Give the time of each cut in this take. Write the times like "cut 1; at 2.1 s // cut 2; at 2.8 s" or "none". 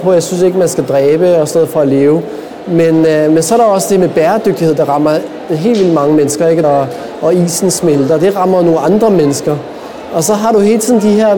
cut 1; at 6.6 s